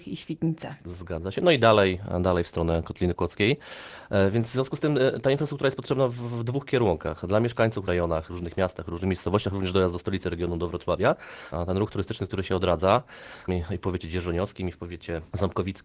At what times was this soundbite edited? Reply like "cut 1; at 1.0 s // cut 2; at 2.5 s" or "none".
cut 1; at 7.9 s // cut 2; at 11.5 s // cut 3; at 13.5 s